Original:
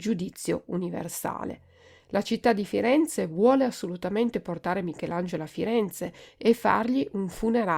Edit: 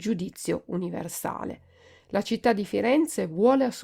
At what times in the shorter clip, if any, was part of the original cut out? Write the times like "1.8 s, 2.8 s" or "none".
none